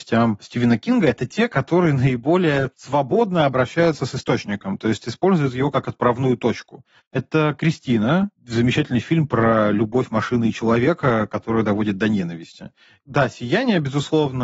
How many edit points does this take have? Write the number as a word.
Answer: one